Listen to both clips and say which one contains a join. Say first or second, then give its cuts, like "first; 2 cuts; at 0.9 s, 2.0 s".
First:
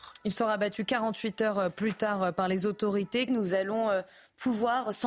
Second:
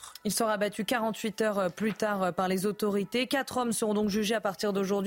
first; 1 cut; at 3.3 s